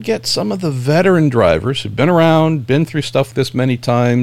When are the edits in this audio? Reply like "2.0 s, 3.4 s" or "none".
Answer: 3.3 s